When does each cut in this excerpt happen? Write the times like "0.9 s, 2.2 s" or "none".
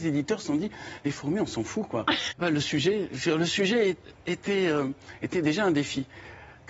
2.3 s